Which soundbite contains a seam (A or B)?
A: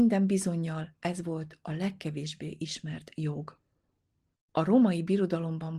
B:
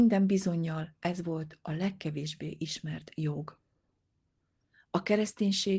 A